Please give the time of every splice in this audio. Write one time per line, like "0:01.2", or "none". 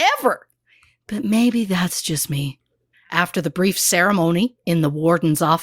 0:02.9